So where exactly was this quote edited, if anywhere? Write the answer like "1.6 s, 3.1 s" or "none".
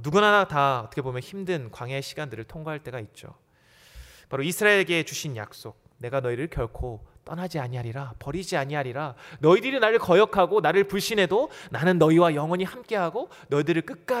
4.3 s